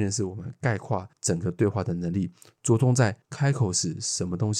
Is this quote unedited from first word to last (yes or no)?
yes